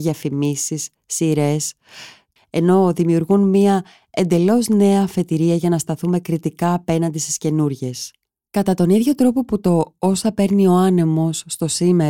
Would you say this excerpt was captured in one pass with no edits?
no; 1 cut; at 2.4 s

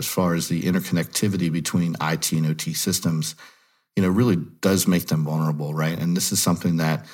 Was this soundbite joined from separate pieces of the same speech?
no; 0 cuts

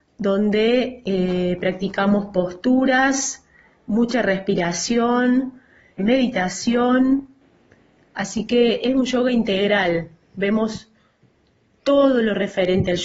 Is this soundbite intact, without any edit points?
no; 1 cut; at 6.0 s

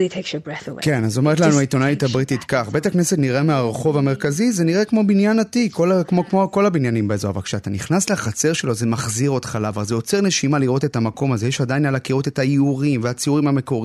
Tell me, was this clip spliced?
no; 0 cuts

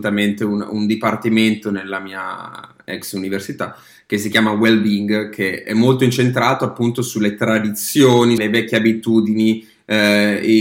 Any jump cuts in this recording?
yes; 2 cuts; at 5.6 s, 8.4 s

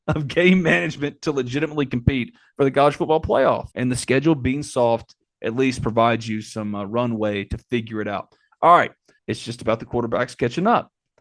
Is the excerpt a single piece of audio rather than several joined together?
no; 2 cuts; at 3.7 s, 9.2 s

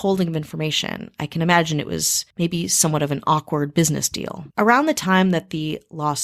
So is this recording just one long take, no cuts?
no; 2 cuts; at 2.3 s, 4.5 s

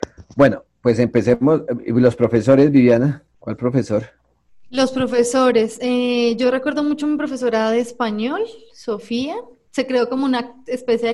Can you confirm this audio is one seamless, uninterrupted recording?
yes; 0 cuts

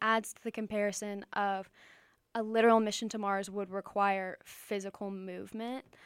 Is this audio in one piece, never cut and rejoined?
yes; 0 cuts

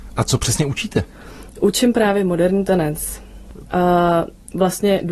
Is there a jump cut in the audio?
yes; 1 cut; at 3.7 s

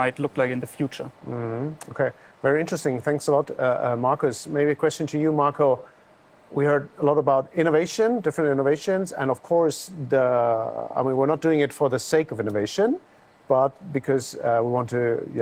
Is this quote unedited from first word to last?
yes; 0 cuts

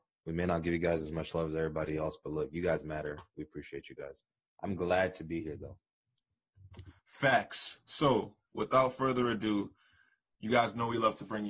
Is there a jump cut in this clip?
no; 0 cuts

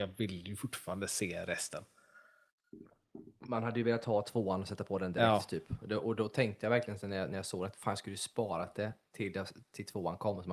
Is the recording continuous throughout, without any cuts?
yes; 0 cuts

